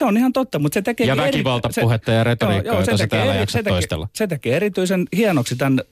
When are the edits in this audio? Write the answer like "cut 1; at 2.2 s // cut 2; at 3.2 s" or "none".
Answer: none